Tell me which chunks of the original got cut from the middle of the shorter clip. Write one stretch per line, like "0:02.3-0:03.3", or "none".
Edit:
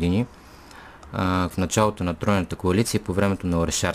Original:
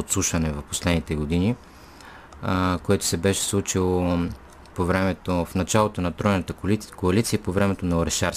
0:02.8-0:05.5
0:06.5-0:07.0